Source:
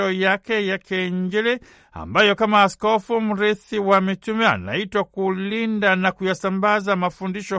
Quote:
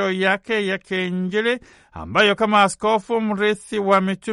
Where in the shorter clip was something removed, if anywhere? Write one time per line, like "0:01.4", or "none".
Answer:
none